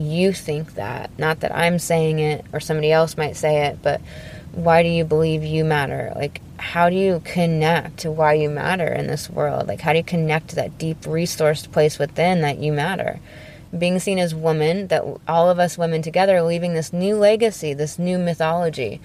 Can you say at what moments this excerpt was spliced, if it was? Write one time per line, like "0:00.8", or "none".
0:13.7